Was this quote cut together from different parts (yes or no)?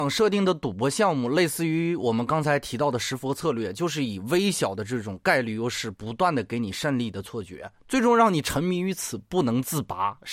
no